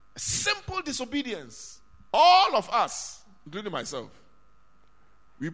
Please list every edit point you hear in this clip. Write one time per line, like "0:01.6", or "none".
0:02.1